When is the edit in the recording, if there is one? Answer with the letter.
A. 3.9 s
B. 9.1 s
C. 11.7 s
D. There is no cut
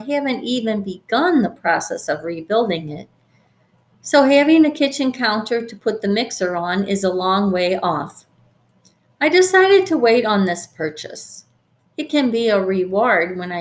D